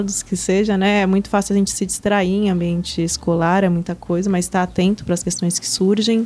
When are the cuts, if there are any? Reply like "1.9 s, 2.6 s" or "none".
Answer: none

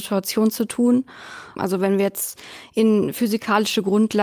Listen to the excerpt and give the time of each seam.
1.6 s

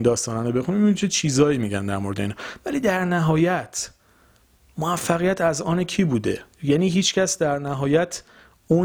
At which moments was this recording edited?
6.5 s

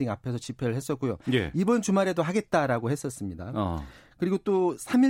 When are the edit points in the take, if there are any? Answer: none

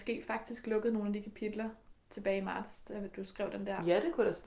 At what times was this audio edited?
none

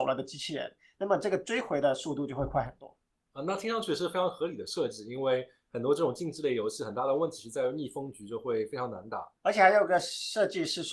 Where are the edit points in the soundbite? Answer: 9.4 s

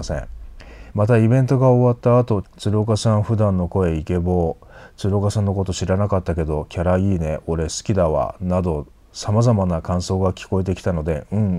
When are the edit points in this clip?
0.9 s, 2.4 s

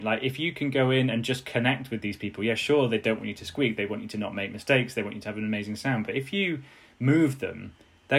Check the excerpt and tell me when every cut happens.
none

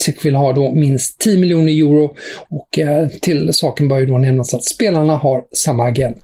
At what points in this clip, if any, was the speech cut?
2.4 s

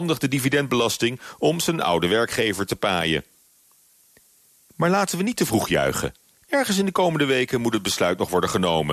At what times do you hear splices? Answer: 6.3 s

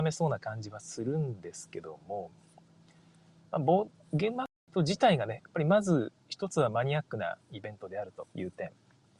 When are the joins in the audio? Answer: 8.3 s

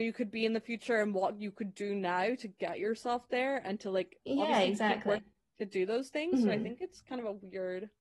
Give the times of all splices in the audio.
5.2 s

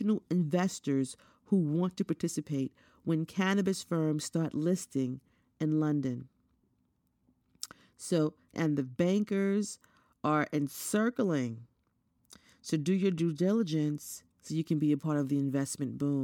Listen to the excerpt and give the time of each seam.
8.5 s, 14.3 s

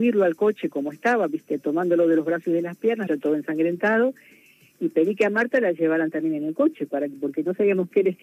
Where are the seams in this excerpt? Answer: 3.1 s

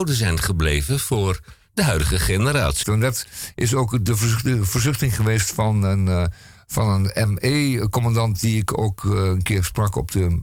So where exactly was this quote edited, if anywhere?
2.8 s

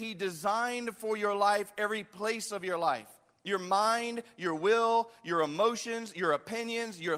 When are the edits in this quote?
none

